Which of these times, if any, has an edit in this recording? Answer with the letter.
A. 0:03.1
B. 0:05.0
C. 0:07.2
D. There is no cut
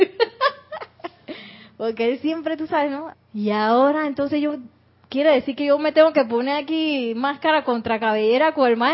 A